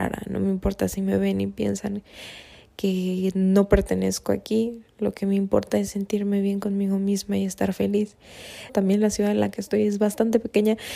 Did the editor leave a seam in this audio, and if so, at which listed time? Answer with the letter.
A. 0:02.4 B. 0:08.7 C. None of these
B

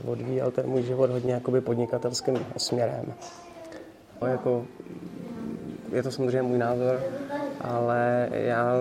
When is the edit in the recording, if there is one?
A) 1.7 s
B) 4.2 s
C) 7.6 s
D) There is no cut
B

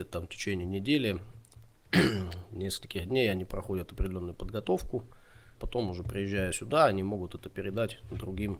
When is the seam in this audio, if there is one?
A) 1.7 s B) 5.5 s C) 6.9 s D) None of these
B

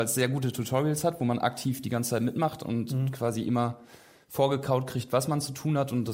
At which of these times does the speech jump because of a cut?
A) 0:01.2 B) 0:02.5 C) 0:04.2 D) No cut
D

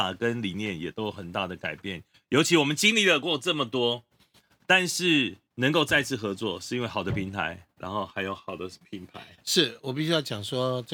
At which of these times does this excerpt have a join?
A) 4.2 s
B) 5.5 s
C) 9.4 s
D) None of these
B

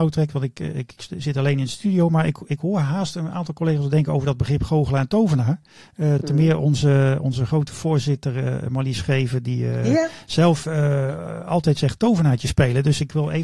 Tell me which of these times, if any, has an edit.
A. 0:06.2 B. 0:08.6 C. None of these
C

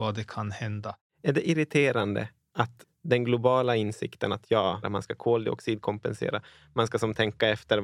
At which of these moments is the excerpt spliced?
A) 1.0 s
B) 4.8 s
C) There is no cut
B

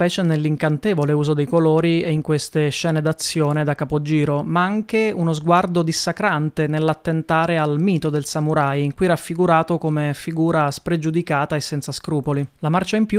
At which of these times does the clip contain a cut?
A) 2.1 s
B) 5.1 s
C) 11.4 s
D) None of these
D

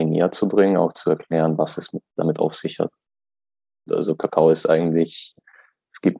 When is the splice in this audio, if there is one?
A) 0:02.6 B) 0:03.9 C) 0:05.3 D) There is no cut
B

